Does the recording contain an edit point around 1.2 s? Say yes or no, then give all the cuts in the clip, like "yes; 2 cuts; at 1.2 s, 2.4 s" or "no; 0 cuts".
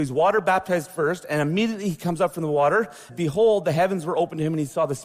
no; 1 cut; at 3.1 s